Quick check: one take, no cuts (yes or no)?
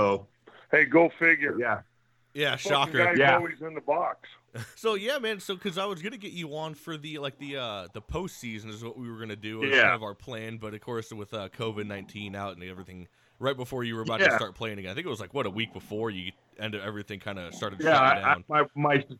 no